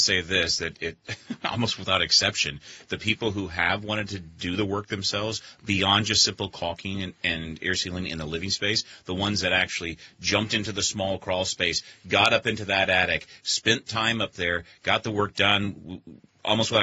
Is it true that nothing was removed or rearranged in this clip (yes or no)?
yes